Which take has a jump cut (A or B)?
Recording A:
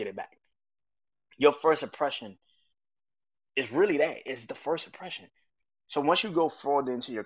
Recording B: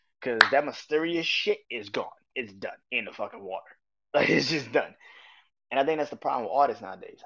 B